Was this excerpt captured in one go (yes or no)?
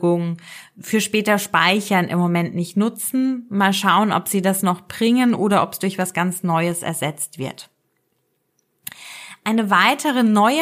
yes